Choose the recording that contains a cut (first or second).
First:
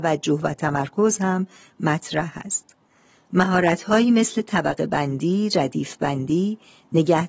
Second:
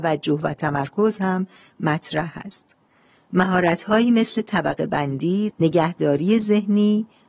second